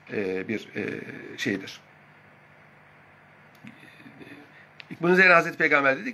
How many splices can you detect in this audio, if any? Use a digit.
1